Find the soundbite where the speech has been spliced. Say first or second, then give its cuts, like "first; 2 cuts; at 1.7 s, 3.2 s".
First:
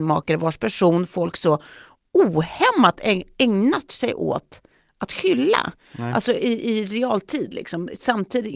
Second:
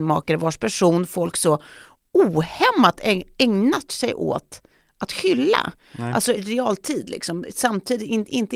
second; 1 cut; at 6.4 s